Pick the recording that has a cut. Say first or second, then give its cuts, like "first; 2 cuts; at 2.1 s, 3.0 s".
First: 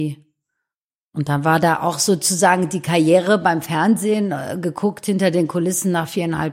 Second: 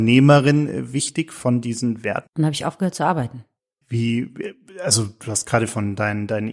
second; 2 cuts; at 2.3 s, 3.8 s